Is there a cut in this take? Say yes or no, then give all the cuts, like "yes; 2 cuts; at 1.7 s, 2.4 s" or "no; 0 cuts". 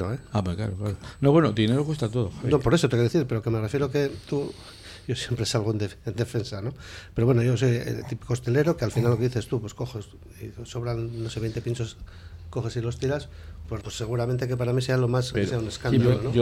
yes; 2 cuts; at 13.8 s, 15.3 s